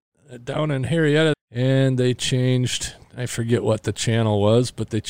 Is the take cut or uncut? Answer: cut